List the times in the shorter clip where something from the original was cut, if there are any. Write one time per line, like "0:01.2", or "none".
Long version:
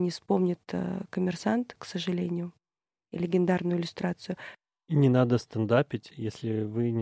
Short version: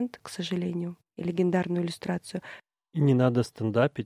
0:01.1